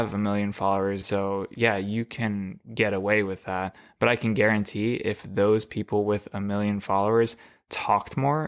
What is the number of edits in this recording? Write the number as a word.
one